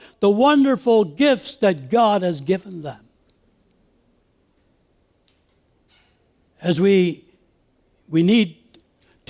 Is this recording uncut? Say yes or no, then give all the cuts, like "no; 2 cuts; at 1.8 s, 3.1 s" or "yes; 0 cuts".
yes; 0 cuts